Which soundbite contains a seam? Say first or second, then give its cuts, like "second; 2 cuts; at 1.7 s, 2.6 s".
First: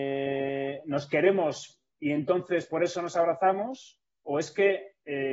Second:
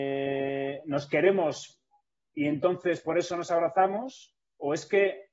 first; 1 cut; at 1.9 s